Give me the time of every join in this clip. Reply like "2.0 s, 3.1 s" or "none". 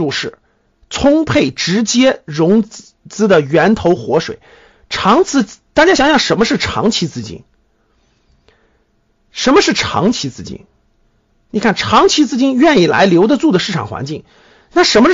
none